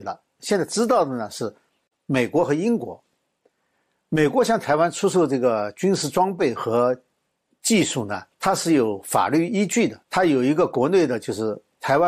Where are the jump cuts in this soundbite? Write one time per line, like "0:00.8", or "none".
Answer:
0:08.3
0:10.0